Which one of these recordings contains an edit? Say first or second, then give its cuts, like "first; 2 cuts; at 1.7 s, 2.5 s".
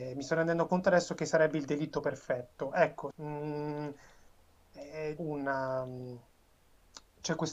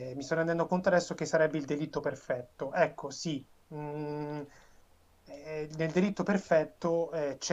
first; 2 cuts; at 3.1 s, 5.2 s